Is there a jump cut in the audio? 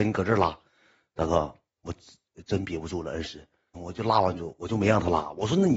yes; 1 cut; at 3.7 s

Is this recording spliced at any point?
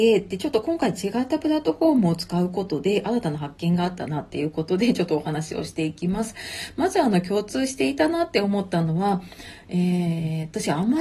no; 0 cuts

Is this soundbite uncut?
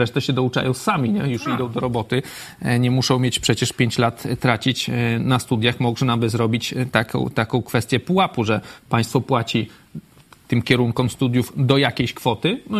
yes; 0 cuts

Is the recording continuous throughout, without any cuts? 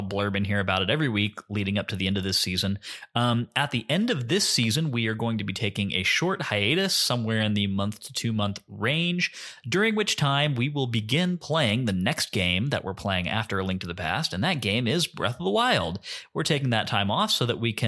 yes; 0 cuts

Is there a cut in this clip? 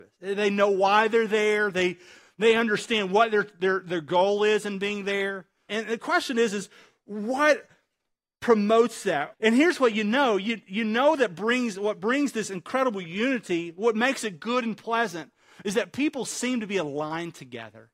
yes; 2 cuts; at 5.7 s, 9.3 s

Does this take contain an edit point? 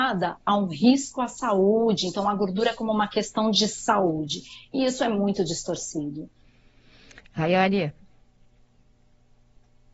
no; 0 cuts

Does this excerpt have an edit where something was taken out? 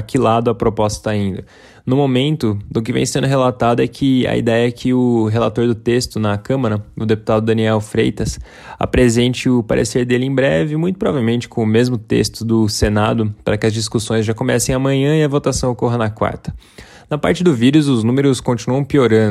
no; 0 cuts

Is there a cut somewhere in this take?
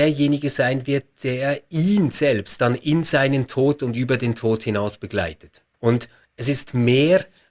yes; 1 cut; at 5.7 s

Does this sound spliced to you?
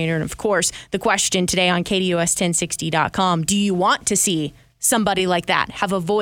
no; 0 cuts

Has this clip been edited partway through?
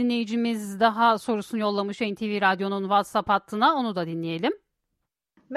no; 0 cuts

